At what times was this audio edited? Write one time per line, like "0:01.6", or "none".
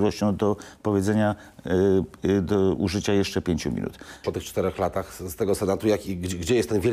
0:04.2